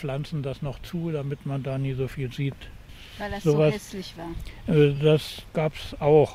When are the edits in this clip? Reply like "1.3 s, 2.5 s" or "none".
none